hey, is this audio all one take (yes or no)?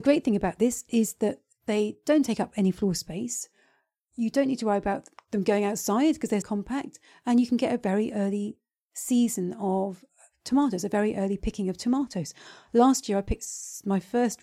no